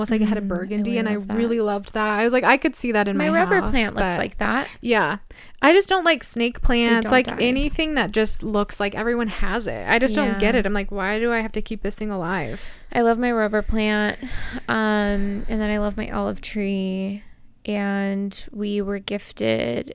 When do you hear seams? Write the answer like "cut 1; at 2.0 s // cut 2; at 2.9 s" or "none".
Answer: none